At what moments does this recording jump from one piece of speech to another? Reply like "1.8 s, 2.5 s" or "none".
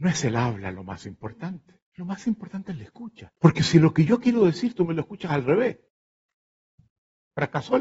1.9 s, 3.4 s